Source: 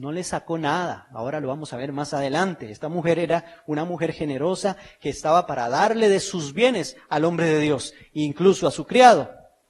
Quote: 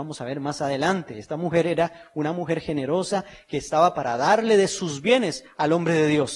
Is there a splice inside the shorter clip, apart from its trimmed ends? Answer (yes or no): no